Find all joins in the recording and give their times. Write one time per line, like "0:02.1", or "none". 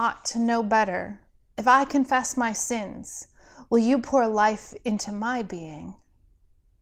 0:01.5